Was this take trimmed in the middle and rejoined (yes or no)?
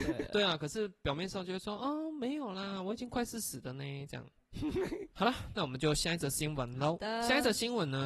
no